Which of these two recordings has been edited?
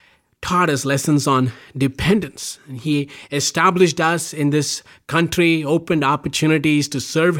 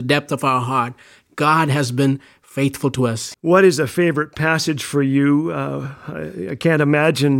second; 1 cut; at 3.3 s

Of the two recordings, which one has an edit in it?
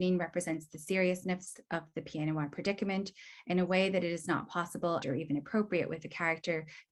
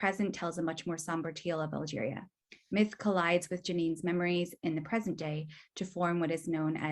first; 1 cut; at 5.0 s

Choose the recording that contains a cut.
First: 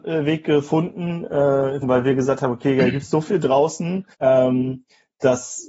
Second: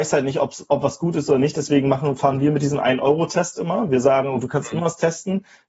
first; 2 cuts; at 1.8 s, 4.1 s

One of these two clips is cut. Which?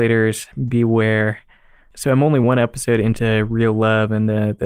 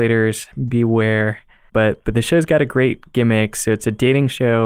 second; 1 cut; at 1.7 s

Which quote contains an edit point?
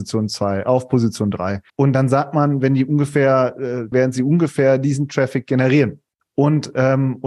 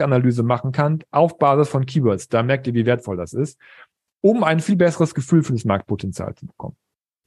first; 3 cuts; at 1.7 s, 3.9 s, 6.2 s

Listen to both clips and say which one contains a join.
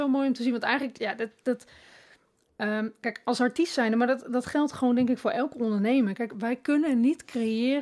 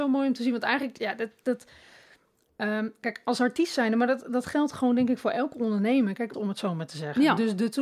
second; 1 cut; at 6.3 s

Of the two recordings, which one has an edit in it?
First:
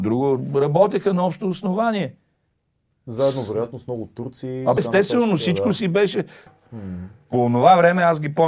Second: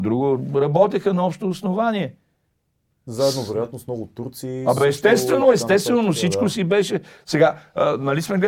first; 2 cuts; at 4.8 s, 6.5 s

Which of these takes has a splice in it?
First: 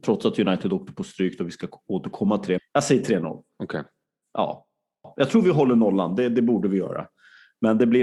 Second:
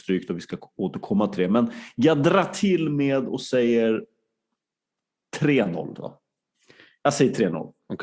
first; 1 cut; at 2.6 s

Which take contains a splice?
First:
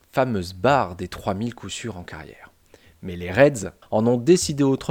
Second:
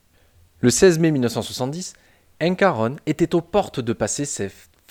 first; 1 cut; at 3.8 s

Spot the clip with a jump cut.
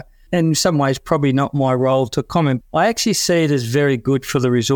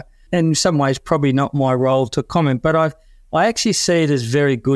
first; 1 cut; at 2.6 s

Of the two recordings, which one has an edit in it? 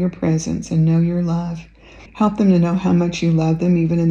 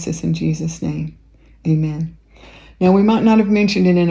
first; 1 cut; at 2.1 s

